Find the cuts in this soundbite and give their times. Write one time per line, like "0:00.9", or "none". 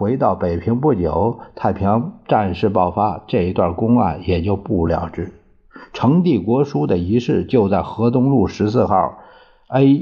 0:04.9